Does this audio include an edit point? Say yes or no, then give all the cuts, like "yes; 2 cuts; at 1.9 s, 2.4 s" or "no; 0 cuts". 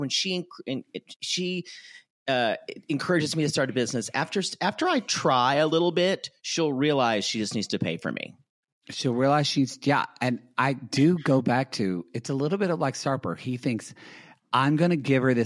no; 0 cuts